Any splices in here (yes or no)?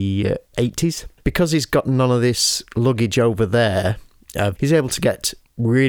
yes